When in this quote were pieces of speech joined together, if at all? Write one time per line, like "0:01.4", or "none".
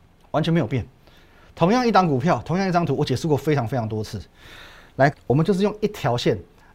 0:05.1